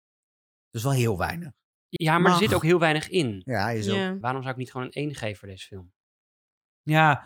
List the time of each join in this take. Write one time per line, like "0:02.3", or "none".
0:02.0
0:04.2